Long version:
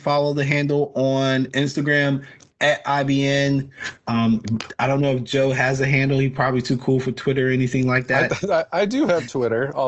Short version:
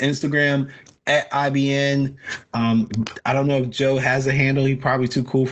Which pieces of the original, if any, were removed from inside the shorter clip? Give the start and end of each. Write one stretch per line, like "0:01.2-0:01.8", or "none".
none